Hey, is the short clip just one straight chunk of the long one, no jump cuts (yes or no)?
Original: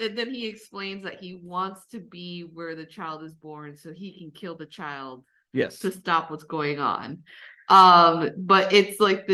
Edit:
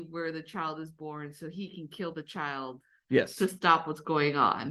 yes